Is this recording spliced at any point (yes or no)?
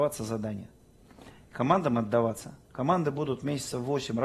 no